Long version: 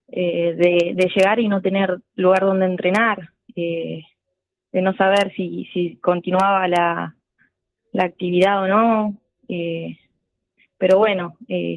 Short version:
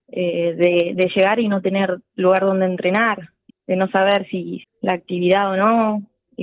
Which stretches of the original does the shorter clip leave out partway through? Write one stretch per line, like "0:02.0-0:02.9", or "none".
0:03.5-0:04.5
0:05.7-0:07.7